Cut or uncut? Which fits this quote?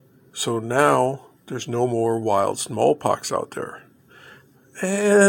uncut